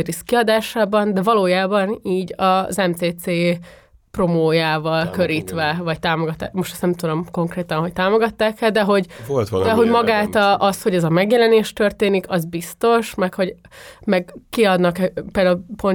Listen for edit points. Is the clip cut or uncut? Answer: uncut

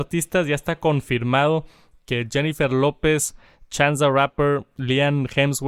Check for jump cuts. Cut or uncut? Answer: uncut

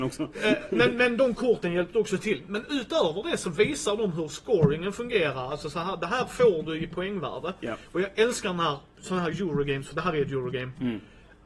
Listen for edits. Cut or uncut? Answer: uncut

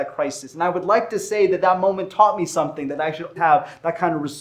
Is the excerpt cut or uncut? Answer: cut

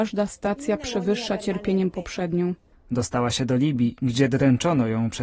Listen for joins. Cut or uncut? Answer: cut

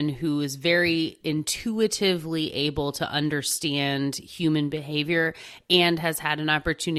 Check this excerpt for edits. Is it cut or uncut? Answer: uncut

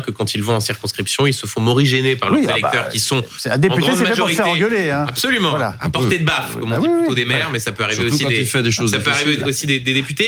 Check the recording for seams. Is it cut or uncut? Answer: uncut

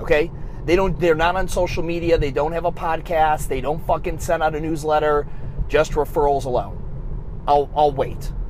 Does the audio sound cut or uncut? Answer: uncut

